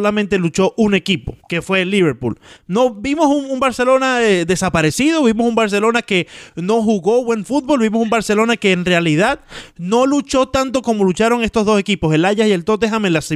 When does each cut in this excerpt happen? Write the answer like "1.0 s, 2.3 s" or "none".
1.4 s